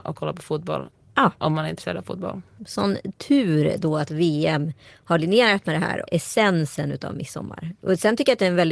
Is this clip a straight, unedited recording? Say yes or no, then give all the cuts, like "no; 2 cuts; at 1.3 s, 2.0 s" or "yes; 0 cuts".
no; 2 cuts; at 2.6 s, 6.0 s